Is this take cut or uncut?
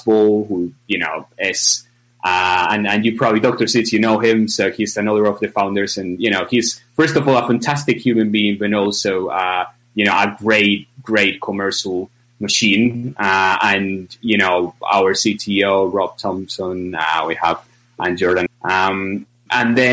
cut